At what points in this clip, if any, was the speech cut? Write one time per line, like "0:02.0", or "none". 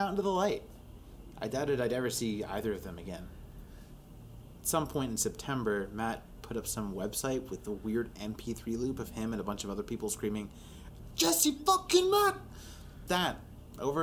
0:11.1
0:13.1

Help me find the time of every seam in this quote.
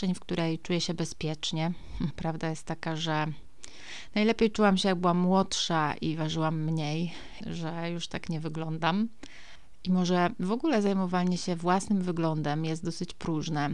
0:02.1
0:07.4

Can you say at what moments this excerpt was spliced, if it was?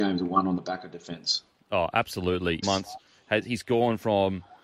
0:02.6

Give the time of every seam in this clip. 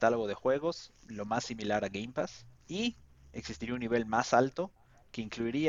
none

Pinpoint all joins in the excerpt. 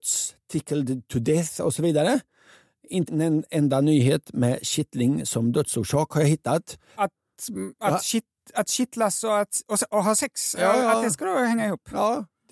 0:03.1
0:07.0

